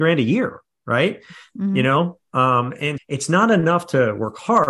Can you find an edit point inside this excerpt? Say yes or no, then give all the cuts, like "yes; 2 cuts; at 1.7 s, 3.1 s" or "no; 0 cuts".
yes; 1 cut; at 3.0 s